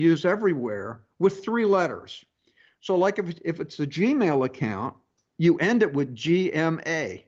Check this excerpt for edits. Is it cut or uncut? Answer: uncut